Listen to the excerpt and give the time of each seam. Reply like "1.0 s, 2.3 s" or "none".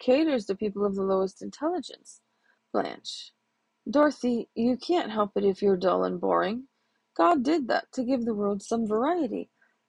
2.6 s